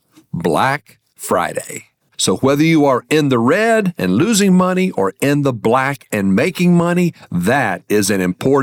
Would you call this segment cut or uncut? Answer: cut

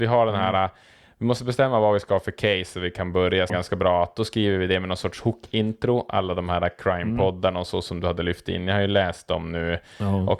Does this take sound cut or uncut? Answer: cut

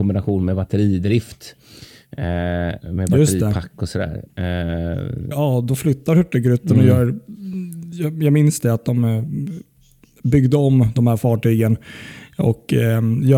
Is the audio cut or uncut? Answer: cut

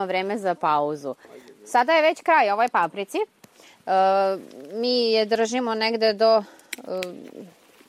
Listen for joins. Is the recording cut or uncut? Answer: uncut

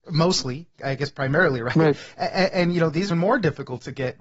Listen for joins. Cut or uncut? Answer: cut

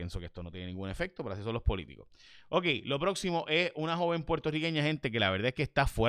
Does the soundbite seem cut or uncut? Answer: uncut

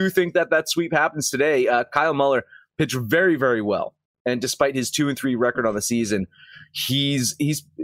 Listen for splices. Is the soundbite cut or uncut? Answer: uncut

